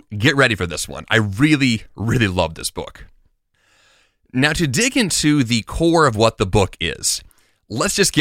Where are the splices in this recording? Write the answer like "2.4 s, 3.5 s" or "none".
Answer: none